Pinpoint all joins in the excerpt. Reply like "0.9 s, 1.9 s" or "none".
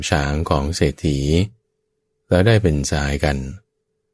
none